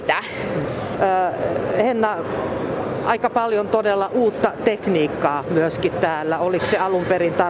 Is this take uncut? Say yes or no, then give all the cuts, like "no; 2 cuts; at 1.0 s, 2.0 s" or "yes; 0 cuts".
no; 1 cut; at 1.0 s